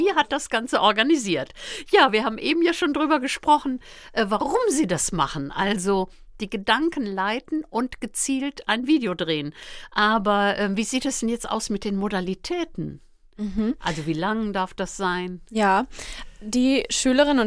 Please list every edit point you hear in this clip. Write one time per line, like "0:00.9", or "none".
none